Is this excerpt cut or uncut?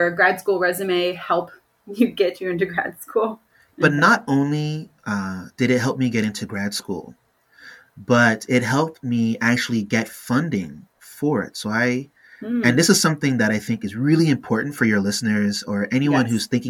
cut